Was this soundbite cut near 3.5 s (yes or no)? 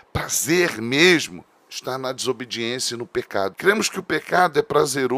yes